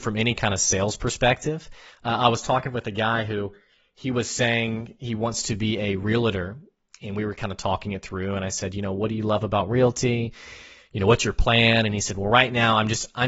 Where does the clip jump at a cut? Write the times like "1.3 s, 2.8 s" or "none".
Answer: none